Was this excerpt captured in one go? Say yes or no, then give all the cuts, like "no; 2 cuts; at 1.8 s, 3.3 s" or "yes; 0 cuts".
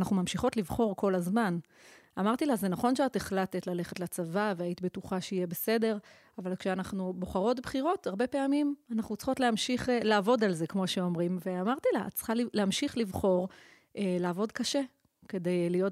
yes; 0 cuts